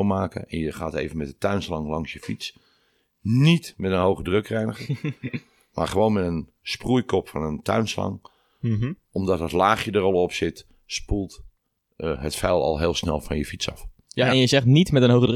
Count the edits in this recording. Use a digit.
0